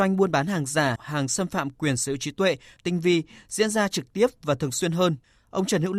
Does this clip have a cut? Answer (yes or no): yes